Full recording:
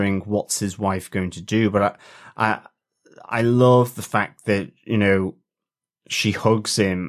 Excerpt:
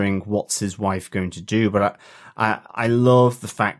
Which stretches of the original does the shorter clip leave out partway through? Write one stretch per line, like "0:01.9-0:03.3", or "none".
0:02.7-0:03.2